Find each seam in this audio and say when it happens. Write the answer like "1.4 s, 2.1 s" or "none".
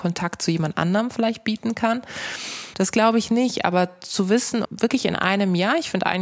2.7 s, 4.6 s